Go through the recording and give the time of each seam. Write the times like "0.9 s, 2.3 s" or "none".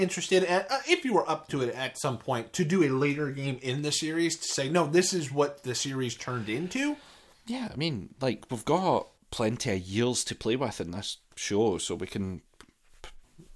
none